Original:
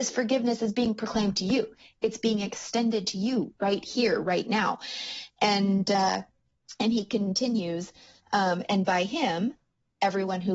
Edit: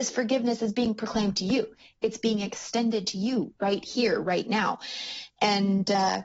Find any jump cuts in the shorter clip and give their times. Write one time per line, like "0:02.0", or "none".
none

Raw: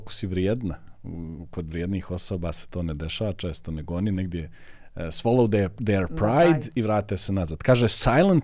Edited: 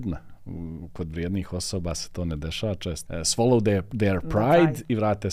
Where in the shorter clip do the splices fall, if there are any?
0:03.1

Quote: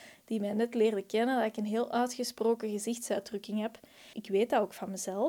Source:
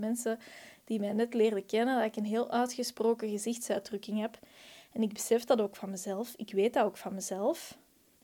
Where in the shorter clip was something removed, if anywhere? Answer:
0:04.1

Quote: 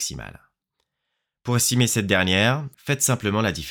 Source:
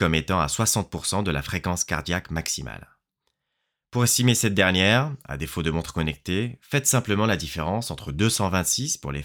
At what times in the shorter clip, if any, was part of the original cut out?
0:02.7

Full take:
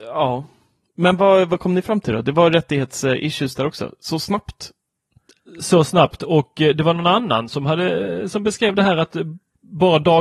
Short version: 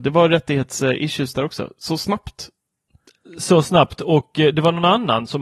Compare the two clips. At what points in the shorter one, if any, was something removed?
none

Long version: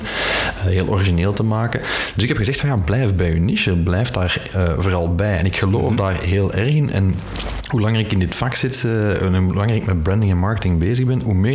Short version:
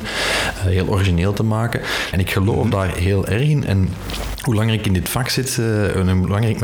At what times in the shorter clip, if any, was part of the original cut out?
0:02.1

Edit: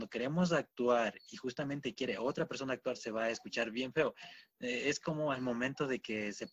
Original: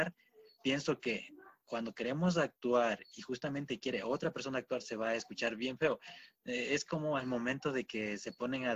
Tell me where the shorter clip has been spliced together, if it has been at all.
none

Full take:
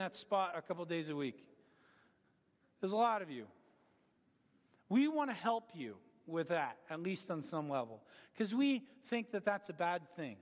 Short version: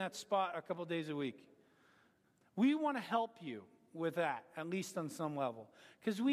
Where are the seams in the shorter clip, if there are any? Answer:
0:02.4

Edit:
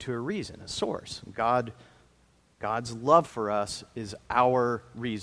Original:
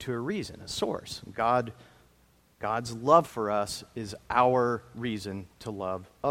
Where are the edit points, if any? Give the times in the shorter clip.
none

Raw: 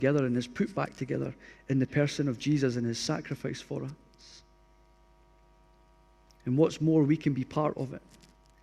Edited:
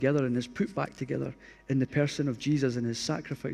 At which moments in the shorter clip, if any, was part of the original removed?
none

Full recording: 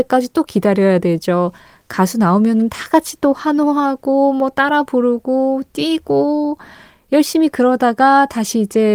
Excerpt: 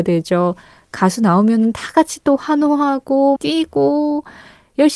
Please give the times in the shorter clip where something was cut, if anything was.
0:03.4

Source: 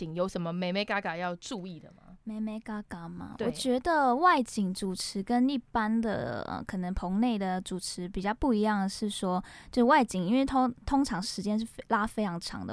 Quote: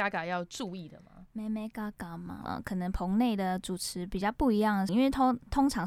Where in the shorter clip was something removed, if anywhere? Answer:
0:02.5
0:04.9

